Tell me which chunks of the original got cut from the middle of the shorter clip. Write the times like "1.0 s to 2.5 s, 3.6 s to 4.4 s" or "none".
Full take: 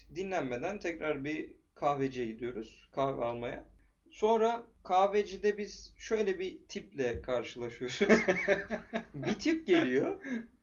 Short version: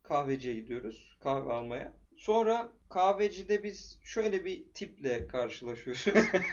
3.8 s to 4.0 s